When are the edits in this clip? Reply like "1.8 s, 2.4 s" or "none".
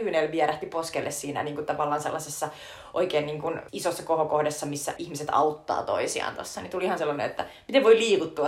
3.7 s, 5.0 s